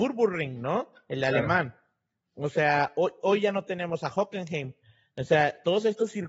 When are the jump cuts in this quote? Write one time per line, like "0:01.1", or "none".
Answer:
none